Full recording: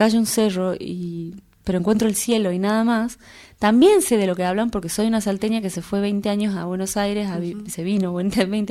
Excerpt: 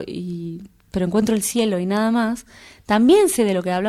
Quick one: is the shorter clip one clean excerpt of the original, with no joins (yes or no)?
yes